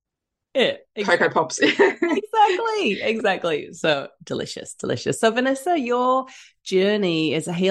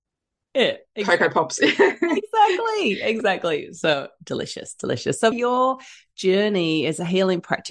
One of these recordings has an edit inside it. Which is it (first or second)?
second